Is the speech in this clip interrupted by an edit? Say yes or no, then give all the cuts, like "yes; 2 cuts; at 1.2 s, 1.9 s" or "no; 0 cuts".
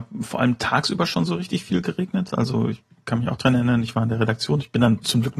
no; 0 cuts